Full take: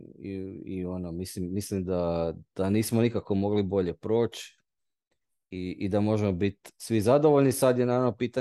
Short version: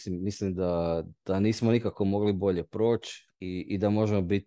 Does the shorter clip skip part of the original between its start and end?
yes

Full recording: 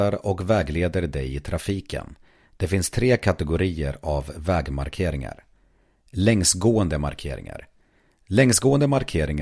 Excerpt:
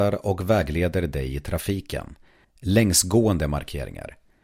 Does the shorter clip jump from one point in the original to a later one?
yes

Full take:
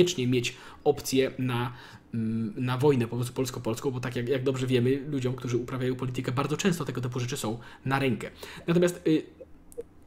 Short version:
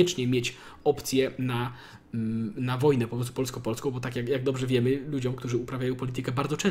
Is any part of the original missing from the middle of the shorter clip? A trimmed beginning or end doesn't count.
no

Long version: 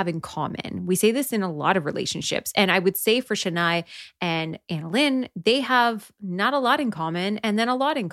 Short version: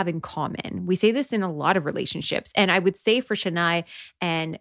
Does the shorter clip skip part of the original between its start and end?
no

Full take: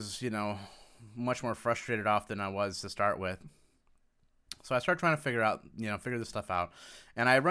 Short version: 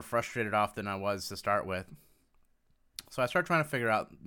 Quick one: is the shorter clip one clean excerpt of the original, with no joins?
yes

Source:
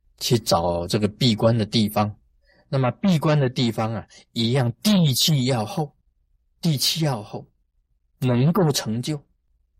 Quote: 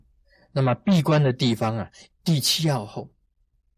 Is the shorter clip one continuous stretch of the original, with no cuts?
no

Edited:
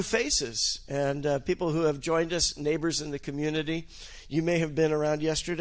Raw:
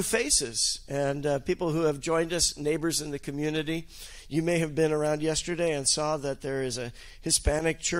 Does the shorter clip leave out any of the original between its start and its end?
no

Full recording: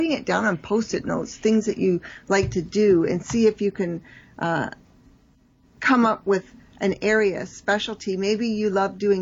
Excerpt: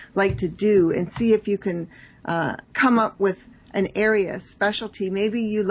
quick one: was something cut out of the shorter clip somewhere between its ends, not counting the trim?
yes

